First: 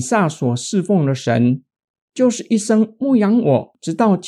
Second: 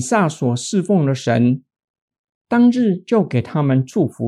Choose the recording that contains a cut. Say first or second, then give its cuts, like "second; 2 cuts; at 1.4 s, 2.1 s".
second; 1 cut; at 2.1 s